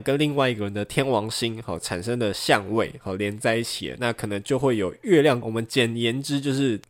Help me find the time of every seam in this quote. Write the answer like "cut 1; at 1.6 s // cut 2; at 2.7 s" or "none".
cut 1; at 5.4 s